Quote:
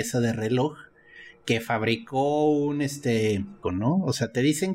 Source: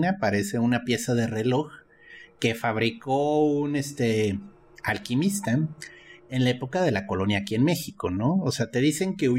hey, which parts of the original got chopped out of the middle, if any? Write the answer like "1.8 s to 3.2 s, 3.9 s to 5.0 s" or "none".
4.6 s to 8.0 s